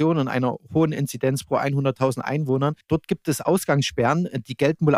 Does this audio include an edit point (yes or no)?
no